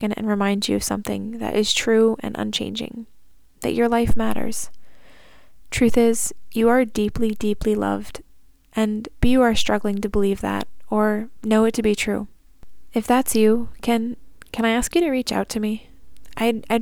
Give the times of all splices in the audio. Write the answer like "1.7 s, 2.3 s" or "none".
9.2 s